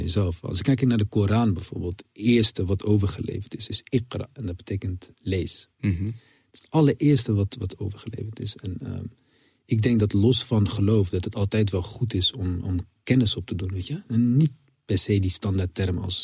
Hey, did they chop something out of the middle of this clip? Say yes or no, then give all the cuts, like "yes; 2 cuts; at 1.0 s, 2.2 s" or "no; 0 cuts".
no; 0 cuts